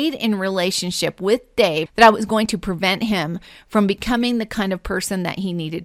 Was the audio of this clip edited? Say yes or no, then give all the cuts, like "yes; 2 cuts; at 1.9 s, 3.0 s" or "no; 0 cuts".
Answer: yes; 1 cut; at 1.9 s